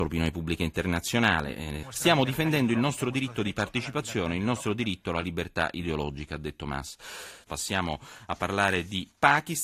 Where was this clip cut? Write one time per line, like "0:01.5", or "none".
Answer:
0:01.8
0:07.4